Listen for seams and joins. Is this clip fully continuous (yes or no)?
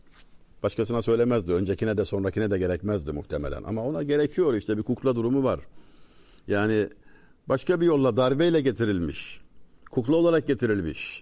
yes